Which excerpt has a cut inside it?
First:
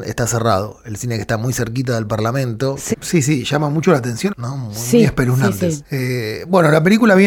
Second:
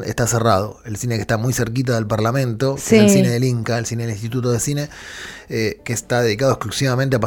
first; 3 cuts; at 2.9 s, 4.3 s, 5.8 s

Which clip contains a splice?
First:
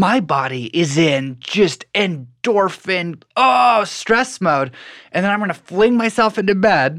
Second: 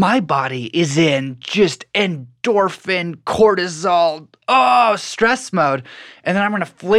first; 1 cut; at 3.2 s

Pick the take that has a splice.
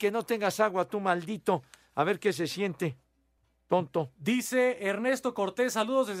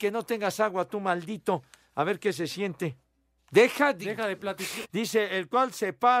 second; 2 cuts; at 3.4 s, 4.8 s

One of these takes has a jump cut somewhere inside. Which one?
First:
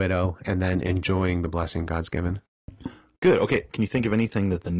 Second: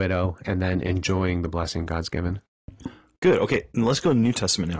first; 1 cut; at 3.7 s

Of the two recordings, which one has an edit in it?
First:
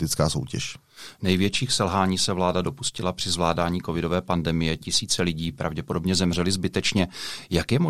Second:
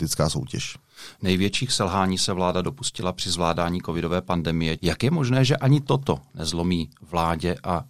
second; 1 cut; at 4.8 s

